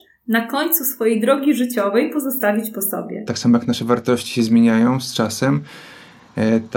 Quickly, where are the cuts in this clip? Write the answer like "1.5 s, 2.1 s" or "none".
3.3 s